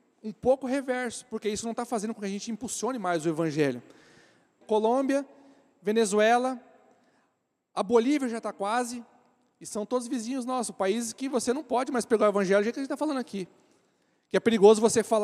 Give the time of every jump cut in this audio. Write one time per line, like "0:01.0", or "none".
0:04.6